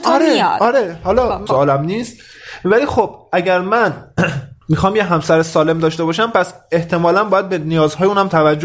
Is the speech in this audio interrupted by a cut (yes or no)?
yes